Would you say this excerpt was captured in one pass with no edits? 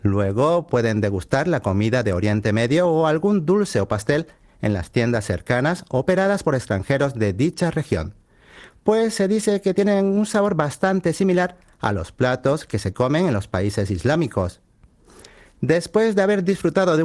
yes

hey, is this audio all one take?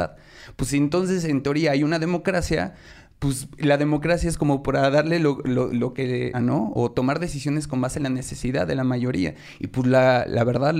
no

